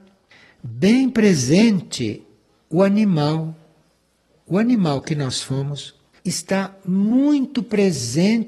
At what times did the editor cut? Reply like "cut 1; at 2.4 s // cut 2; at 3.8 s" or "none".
none